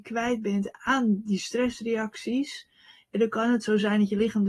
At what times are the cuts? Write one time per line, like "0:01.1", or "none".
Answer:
none